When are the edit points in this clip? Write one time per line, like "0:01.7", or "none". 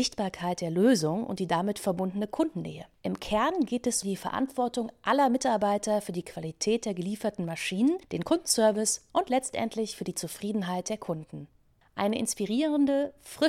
0:04.0